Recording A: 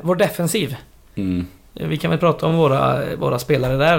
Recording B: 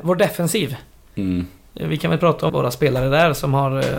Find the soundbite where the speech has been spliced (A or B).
B